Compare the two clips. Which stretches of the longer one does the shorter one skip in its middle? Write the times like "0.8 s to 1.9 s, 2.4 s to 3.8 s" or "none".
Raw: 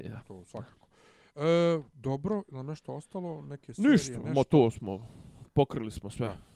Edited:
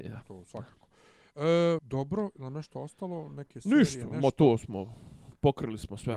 1.8 s to 1.9 s